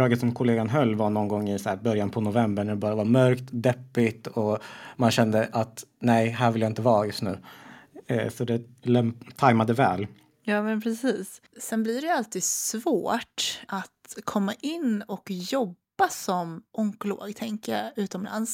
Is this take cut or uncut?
uncut